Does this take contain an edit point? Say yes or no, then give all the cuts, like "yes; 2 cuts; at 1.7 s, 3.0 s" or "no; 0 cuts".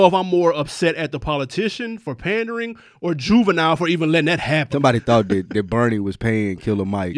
yes; 1 cut; at 4.7 s